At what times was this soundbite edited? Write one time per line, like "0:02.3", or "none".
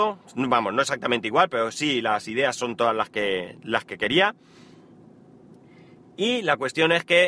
none